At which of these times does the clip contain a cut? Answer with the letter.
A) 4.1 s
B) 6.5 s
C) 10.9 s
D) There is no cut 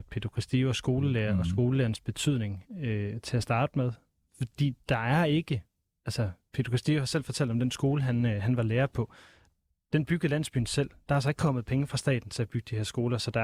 D